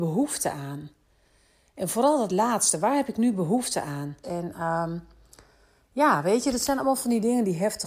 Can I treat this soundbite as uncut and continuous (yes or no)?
no